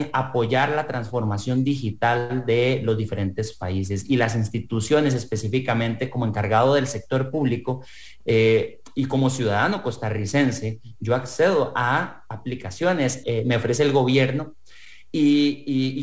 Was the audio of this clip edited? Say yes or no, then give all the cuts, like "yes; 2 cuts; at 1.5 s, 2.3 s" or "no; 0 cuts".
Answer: yes; 1 cut; at 13.2 s